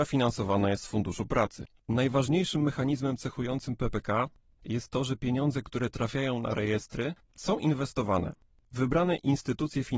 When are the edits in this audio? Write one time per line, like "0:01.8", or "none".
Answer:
none